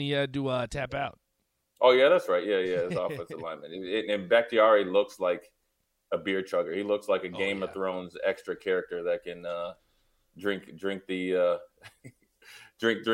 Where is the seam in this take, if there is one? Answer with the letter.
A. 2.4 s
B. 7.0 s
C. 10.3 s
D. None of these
D